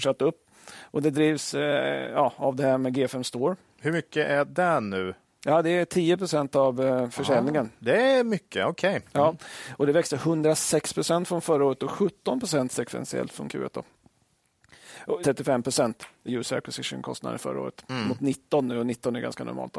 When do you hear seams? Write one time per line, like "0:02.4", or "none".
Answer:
0:15.2
0:16.3